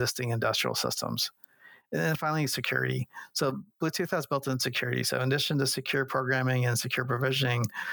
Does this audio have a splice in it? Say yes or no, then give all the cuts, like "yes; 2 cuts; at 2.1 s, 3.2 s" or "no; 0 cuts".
no; 0 cuts